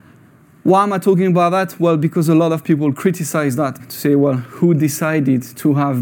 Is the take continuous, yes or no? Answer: no